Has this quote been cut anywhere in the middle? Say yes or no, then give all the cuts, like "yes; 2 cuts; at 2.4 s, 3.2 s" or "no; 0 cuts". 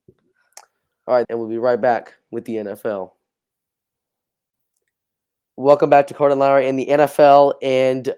yes; 1 cut; at 1.2 s